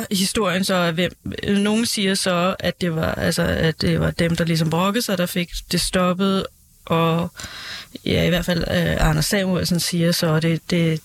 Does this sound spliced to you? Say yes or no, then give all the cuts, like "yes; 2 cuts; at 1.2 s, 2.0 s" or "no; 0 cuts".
no; 0 cuts